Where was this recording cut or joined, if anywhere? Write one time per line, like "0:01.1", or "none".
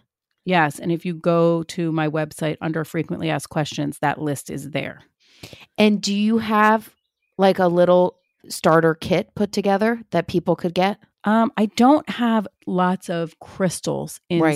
0:11.1
0:13.4